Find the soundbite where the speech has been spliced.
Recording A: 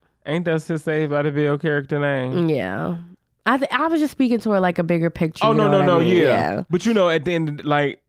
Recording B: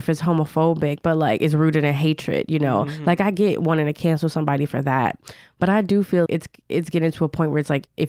B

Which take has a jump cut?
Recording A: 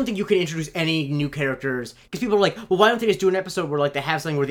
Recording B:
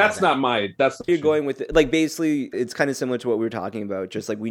B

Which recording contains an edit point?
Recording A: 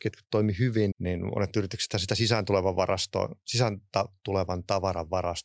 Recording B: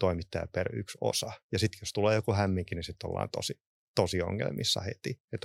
A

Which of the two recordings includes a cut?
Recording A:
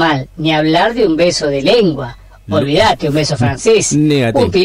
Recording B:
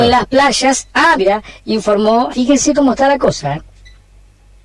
B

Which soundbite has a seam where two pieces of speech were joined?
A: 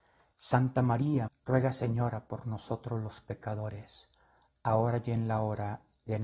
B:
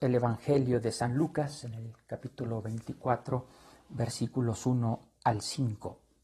A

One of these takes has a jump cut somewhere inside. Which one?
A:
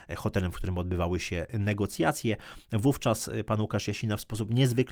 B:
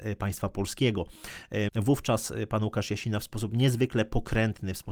B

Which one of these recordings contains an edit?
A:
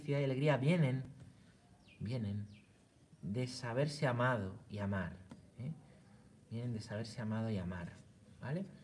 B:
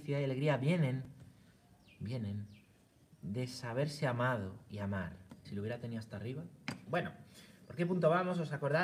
B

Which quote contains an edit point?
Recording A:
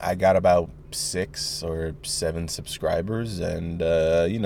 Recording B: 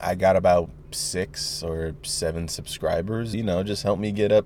B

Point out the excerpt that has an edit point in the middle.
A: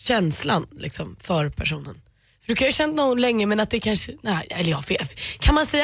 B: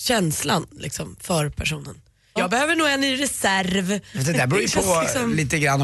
B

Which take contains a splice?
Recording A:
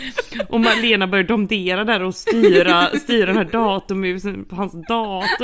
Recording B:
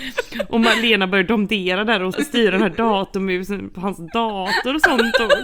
B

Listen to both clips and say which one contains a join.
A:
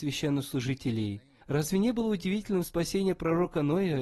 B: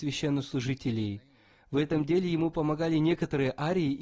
A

